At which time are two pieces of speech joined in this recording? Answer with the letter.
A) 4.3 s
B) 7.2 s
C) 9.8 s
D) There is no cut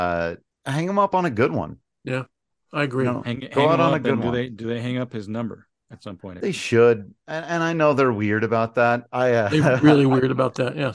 D